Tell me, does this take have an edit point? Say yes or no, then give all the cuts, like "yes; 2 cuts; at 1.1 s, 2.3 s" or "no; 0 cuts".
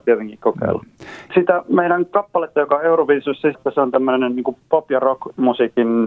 yes; 2 cuts; at 1.3 s, 3.5 s